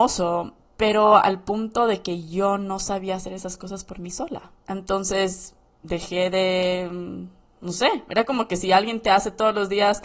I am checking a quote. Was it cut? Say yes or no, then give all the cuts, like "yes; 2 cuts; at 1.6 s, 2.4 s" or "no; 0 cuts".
yes; 1 cut; at 4.6 s